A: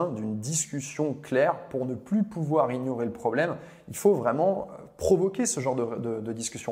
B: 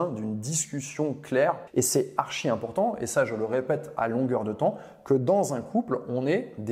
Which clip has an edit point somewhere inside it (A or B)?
B